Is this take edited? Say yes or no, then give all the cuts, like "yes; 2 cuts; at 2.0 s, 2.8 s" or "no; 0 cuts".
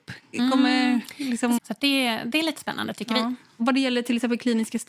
yes; 1 cut; at 1.6 s